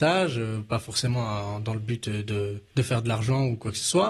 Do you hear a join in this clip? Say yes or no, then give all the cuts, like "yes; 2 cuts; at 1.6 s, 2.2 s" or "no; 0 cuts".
yes; 1 cut; at 2.7 s